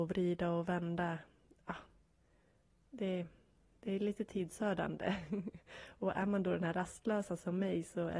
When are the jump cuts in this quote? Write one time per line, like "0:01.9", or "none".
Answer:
none